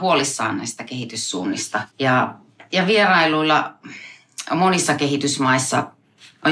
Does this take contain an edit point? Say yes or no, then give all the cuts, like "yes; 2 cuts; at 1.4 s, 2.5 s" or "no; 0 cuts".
yes; 1 cut; at 1.9 s